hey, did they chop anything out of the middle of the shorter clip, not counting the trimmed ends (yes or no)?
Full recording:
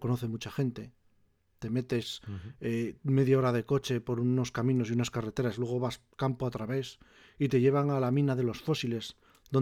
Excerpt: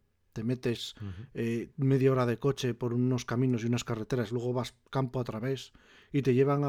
no